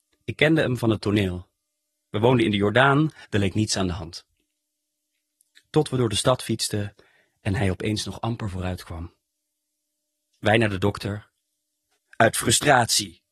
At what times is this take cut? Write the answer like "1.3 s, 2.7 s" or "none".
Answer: 3.2 s, 12.0 s